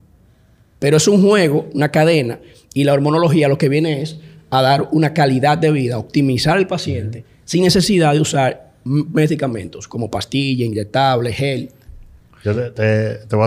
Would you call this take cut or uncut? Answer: uncut